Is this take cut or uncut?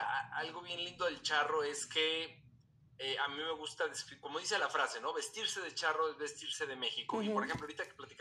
uncut